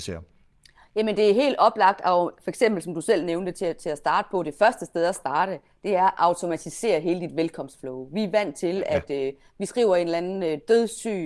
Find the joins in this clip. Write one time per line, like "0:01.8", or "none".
none